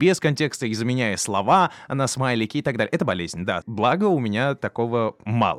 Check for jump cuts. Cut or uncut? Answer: cut